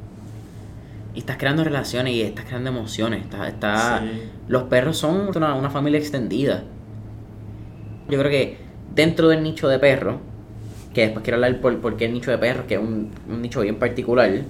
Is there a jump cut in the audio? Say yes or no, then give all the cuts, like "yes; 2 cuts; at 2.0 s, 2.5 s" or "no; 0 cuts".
yes; 2 cuts; at 5.3 s, 8.1 s